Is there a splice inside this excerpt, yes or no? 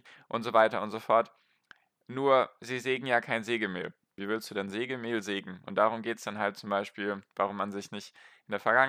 yes